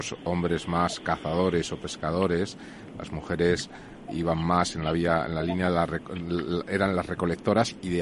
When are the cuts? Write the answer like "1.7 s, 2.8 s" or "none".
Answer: 4.1 s